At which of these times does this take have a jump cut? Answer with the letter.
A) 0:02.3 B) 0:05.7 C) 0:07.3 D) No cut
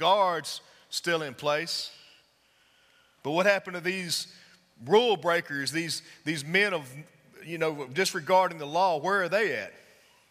D